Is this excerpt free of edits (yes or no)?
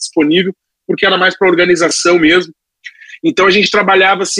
yes